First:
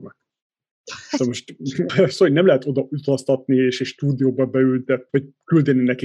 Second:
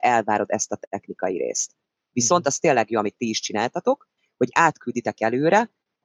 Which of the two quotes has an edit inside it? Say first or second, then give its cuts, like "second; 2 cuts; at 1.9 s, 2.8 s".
first; 2 cuts; at 1.9 s, 5.1 s